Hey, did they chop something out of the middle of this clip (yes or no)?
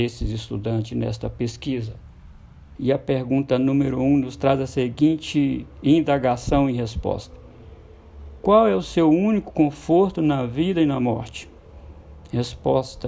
yes